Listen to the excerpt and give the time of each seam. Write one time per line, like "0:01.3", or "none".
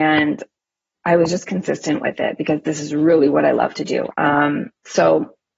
0:04.1